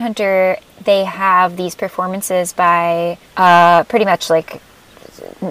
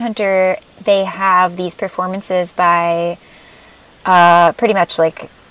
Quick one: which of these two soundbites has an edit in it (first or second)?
first